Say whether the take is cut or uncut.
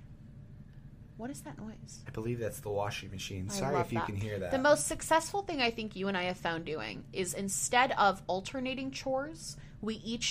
cut